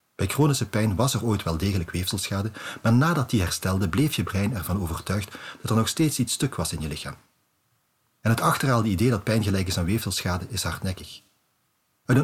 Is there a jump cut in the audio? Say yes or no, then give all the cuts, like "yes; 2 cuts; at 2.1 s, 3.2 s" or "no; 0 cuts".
no; 0 cuts